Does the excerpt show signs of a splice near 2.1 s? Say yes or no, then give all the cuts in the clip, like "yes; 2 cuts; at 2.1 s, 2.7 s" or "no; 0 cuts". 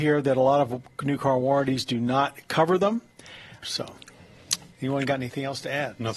no; 1 cut; at 3.6 s